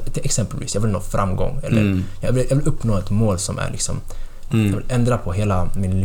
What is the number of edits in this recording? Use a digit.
2